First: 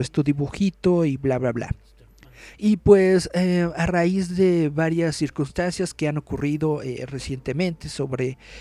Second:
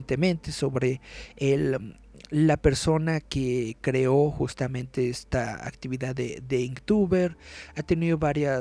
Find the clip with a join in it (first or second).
first